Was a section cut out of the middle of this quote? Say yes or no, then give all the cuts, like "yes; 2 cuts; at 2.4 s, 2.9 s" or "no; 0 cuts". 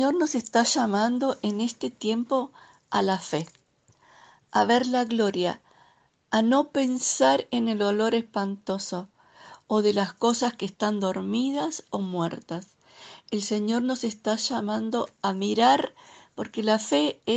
no; 0 cuts